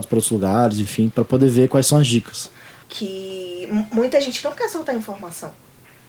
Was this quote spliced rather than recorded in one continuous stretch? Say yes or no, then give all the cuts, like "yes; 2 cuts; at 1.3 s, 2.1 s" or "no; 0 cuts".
yes; 1 cut; at 2.8 s